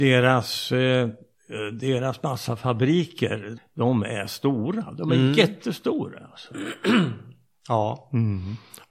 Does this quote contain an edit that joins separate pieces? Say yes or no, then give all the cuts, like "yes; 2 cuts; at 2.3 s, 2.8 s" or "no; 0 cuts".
yes; 1 cut; at 3.6 s